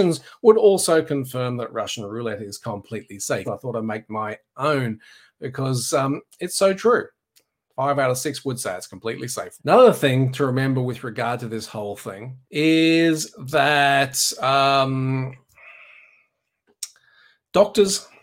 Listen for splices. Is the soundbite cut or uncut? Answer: cut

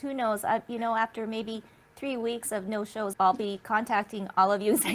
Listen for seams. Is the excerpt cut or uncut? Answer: cut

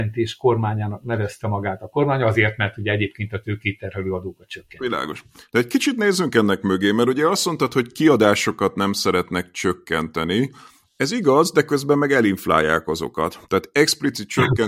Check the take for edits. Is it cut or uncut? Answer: uncut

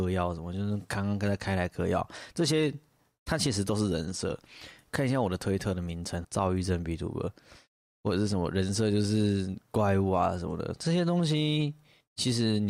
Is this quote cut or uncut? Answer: cut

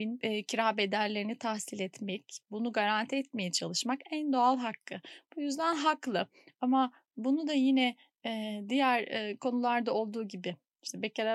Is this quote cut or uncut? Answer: uncut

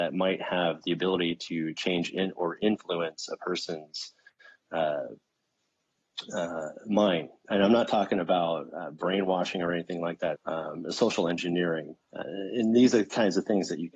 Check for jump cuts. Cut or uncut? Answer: cut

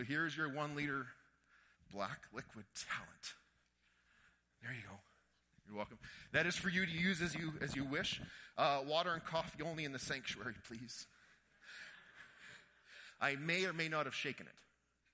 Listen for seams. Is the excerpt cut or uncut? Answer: uncut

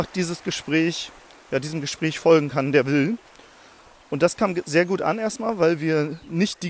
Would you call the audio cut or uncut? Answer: uncut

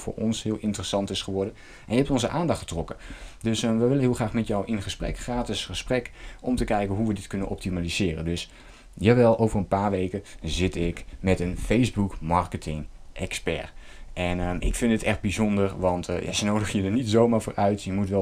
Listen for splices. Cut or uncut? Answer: uncut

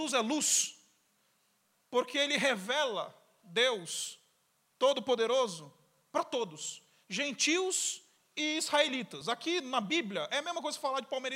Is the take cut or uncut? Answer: uncut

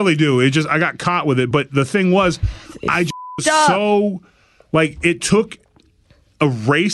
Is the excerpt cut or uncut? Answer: uncut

